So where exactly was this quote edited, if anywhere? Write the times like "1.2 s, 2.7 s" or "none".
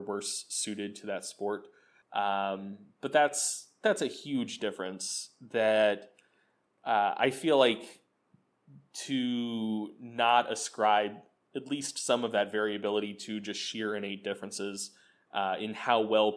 2.0 s